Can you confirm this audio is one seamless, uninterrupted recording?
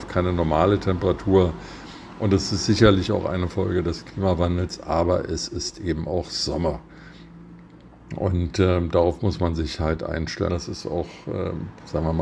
no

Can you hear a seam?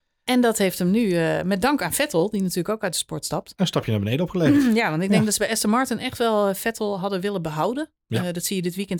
no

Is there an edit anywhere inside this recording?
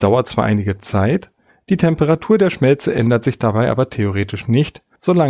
no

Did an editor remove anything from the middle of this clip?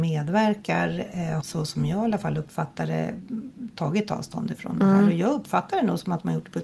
yes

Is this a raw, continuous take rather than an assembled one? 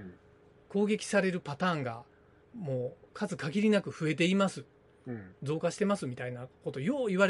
yes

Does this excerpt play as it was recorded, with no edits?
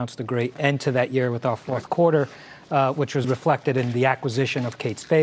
no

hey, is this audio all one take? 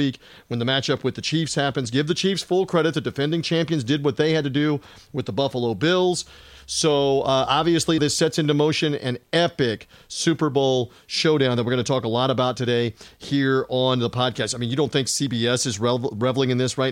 no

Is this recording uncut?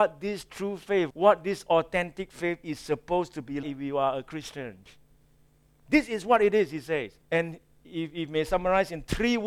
no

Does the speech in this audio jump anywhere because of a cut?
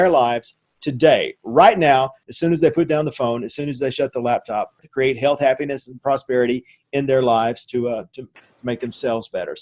yes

